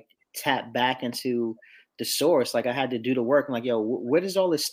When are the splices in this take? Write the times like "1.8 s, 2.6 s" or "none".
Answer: none